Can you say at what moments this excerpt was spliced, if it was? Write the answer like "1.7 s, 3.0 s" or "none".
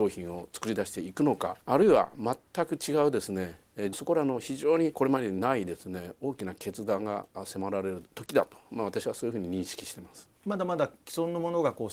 3.9 s, 10.4 s

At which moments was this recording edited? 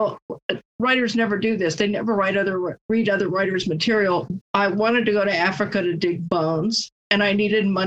4.4 s

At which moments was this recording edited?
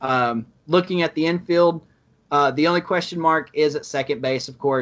none

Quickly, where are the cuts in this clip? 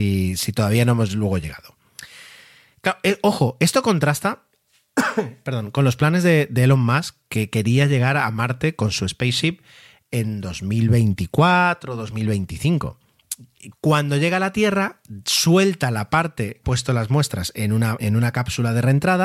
13.7 s, 16.6 s, 18.0 s

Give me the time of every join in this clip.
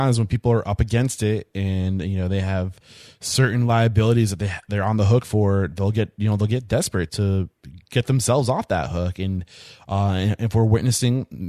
7.1 s

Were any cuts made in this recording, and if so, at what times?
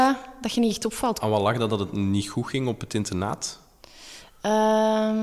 1.2 s

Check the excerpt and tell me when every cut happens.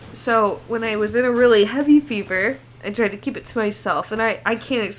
none

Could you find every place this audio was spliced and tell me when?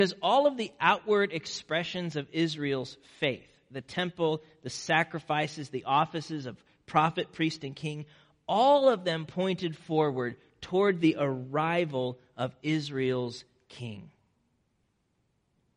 none

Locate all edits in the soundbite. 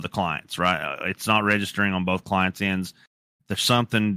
none

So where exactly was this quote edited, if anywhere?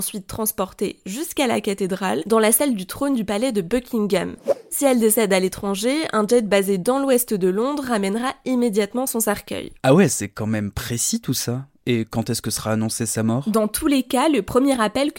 2.2 s

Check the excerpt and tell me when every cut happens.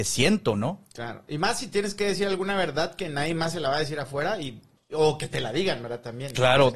none

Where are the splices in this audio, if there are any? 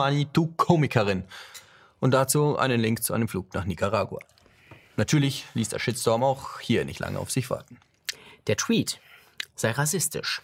none

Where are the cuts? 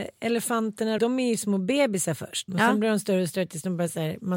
1.0 s, 2.5 s

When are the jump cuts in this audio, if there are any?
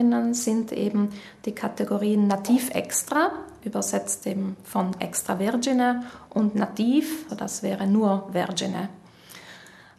7.3 s

